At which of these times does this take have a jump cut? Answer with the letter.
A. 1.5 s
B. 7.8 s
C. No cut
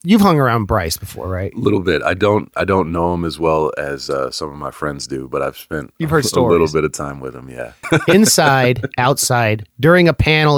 B